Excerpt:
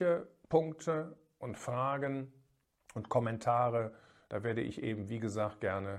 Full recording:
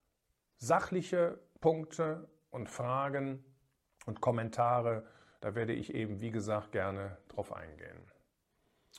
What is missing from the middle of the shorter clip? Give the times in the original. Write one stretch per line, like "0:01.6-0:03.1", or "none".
none